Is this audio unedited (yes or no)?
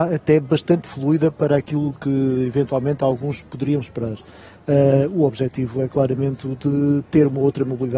yes